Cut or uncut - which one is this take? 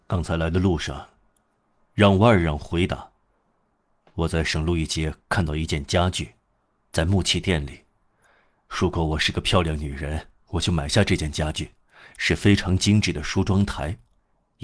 uncut